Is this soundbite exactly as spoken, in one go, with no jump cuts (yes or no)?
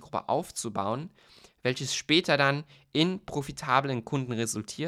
yes